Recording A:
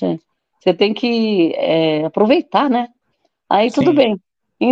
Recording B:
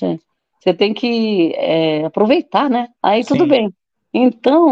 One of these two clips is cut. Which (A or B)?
B